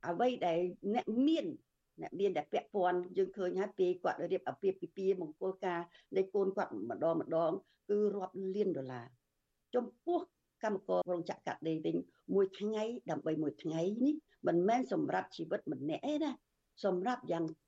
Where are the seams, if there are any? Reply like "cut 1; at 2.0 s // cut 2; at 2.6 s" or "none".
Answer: cut 1; at 11.0 s

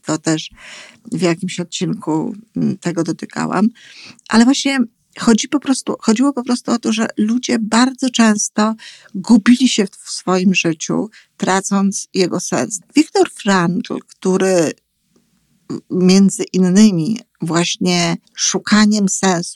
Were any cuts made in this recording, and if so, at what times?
cut 1; at 12.8 s // cut 2; at 18.3 s

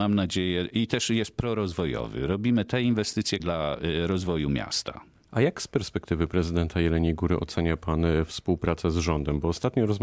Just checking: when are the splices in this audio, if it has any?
cut 1; at 3.4 s

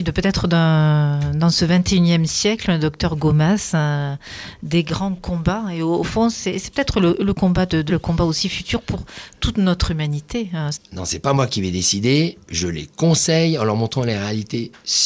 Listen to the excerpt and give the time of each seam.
cut 1; at 7.9 s // cut 2; at 10.7 s

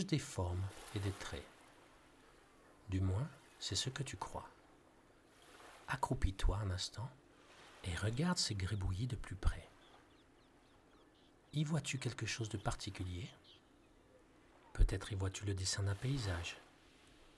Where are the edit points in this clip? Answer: none

